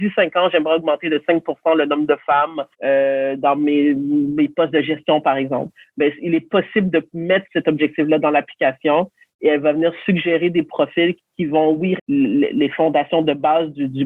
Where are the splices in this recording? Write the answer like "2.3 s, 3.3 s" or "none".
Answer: 2.7 s, 12.0 s